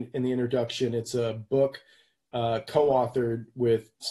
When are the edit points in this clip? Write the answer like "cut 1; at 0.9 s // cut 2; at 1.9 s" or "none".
none